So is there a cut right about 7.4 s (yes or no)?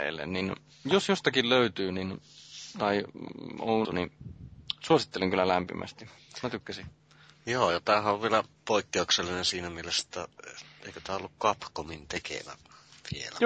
no